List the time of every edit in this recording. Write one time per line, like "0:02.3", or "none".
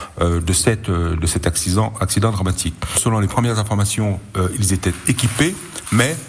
0:02.9